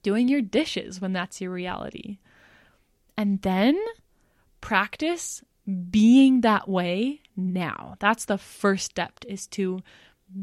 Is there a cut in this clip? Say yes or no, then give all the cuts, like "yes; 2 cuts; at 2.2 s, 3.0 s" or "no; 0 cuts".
no; 0 cuts